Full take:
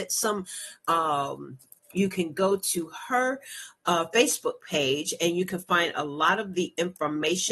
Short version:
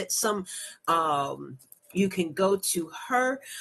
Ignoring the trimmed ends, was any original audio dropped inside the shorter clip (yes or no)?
no